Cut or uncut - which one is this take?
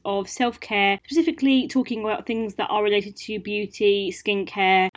uncut